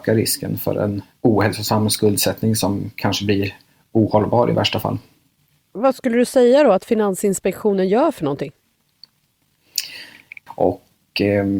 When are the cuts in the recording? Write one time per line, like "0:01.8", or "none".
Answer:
0:10.5